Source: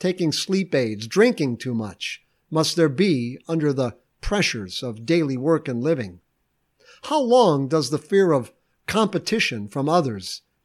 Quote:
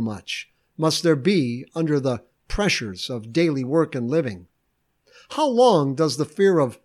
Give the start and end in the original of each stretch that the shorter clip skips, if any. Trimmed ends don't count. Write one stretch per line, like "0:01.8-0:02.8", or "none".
none